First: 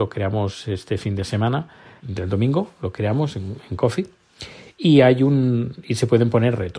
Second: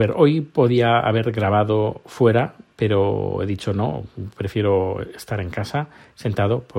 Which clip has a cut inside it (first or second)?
first